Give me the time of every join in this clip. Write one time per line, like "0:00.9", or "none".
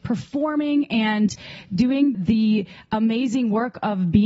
0:02.1